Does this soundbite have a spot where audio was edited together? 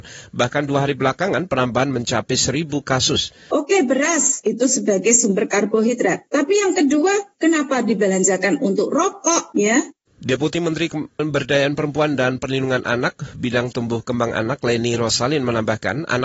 yes; 1 cut; at 3.5 s

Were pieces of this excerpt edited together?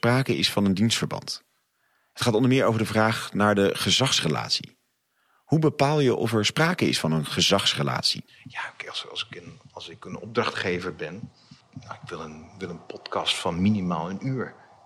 no; 0 cuts

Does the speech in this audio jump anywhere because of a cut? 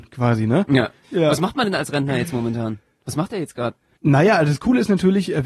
yes; 1 cut; at 1.0 s

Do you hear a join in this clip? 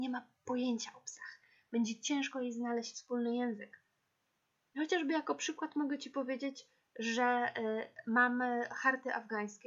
no; 0 cuts

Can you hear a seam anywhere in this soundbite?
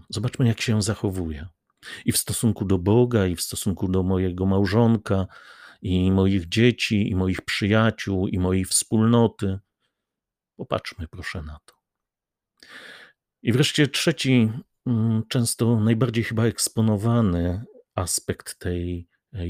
no; 0 cuts

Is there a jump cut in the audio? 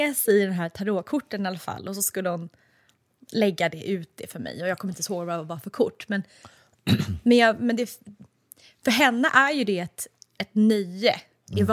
no; 0 cuts

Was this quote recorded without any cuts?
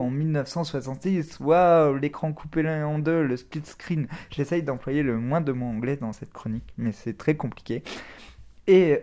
yes; 0 cuts

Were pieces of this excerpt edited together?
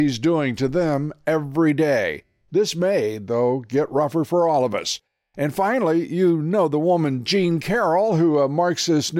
no; 0 cuts

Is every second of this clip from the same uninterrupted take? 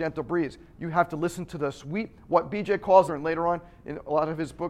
no; 1 cut; at 3.1 s

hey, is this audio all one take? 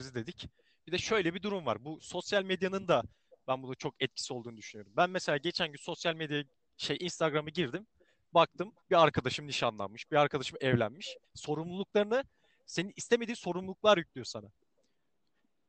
no; 2 cuts; at 8.8 s, 11.2 s

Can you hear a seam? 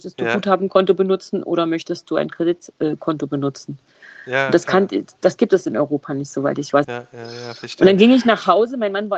yes; 1 cut; at 6.8 s

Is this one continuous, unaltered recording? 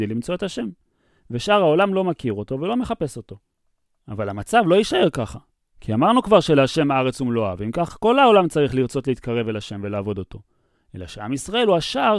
yes; 0 cuts

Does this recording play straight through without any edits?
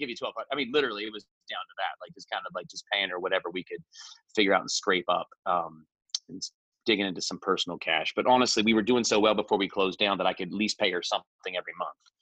yes; 0 cuts

